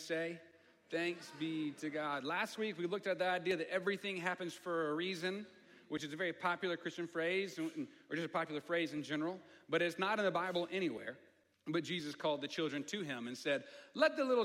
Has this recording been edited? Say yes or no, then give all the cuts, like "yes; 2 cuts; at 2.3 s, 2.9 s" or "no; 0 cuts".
yes; 1 cut; at 11.5 s